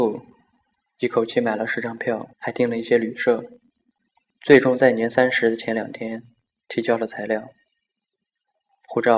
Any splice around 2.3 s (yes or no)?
yes